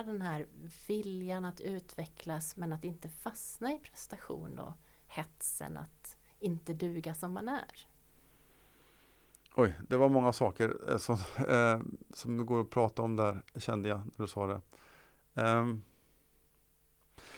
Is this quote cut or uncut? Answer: uncut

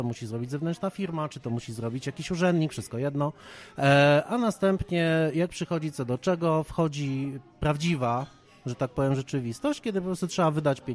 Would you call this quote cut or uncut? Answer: uncut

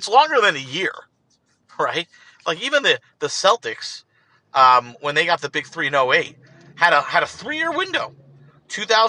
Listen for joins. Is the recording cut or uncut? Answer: uncut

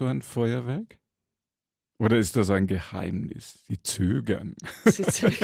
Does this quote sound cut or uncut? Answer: uncut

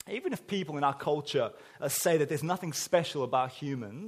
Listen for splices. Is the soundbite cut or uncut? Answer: uncut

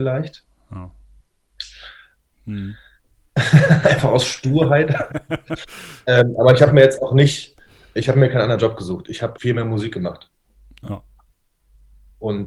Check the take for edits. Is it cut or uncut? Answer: cut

